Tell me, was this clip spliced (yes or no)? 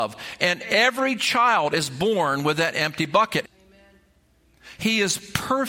yes